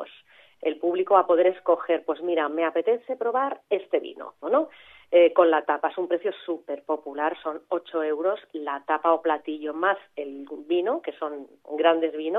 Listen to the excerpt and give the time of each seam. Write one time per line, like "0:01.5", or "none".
0:04.4

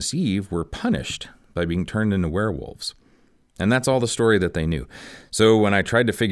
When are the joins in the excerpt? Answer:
none

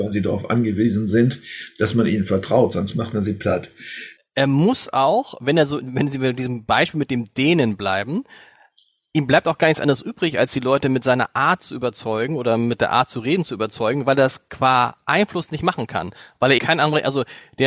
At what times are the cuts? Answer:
0:04.2
0:16.6

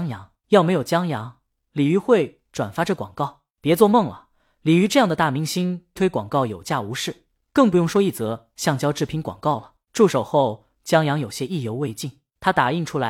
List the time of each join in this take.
0:06.0
0:09.9

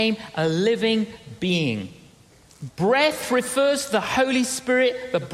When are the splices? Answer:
0:02.7

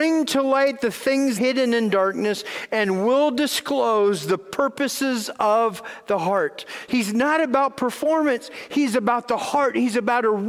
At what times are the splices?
0:01.4
0:06.9

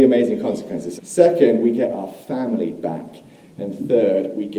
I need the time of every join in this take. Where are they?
0:01.0

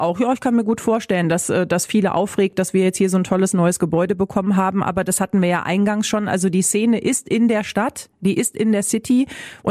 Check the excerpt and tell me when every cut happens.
none

